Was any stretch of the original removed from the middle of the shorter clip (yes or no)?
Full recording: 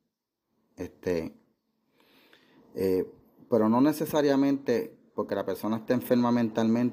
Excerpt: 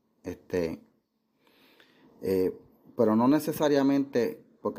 no